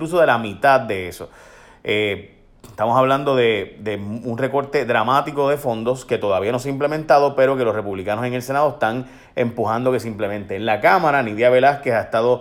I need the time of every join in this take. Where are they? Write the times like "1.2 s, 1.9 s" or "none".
none